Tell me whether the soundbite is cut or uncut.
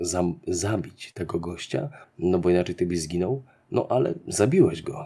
cut